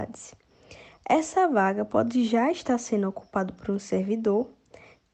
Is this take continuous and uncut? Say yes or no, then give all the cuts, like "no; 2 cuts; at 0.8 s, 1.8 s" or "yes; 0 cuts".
yes; 0 cuts